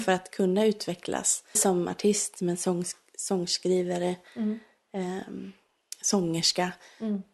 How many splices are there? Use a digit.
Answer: 1